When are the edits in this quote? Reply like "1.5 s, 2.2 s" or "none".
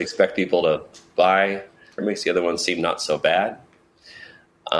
2.0 s